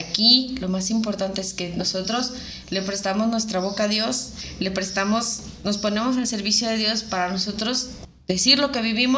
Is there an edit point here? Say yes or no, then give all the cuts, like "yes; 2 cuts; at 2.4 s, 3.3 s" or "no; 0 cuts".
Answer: no; 0 cuts